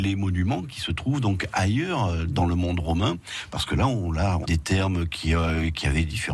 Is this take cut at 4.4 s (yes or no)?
yes